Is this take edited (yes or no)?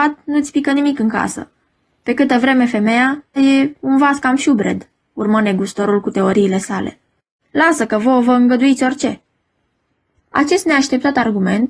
yes